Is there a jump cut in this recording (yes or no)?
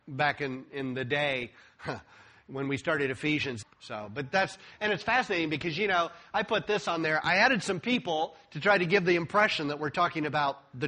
yes